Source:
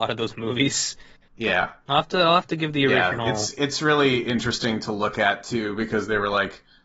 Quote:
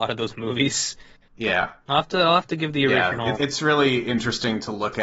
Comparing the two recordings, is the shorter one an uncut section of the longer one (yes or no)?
no